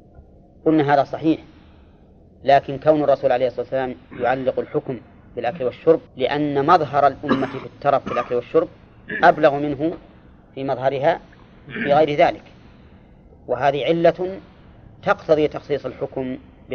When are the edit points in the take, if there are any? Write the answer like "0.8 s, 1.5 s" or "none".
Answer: 6.1 s

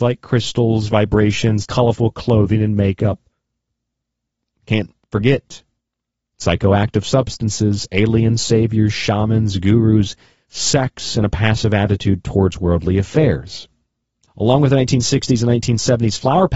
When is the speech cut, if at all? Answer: 1.6 s, 14.3 s

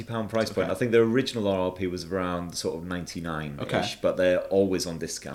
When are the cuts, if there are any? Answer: none

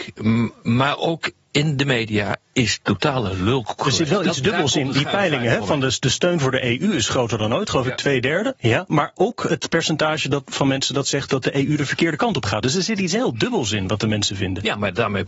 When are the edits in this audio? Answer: 8.5 s, 12.6 s

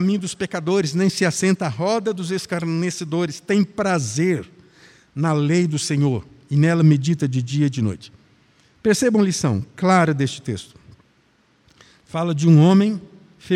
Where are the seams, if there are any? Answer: none

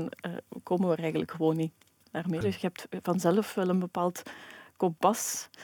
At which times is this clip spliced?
2.4 s

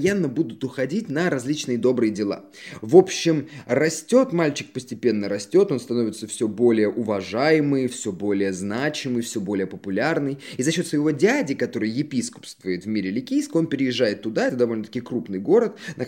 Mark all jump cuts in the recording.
none

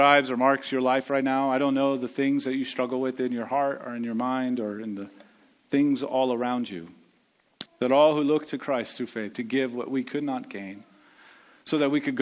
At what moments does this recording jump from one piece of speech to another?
7.7 s, 9.3 s

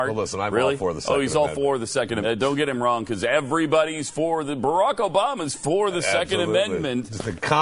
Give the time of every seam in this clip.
2.2 s

